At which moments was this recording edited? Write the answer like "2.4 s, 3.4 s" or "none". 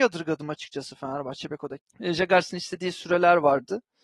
1.8 s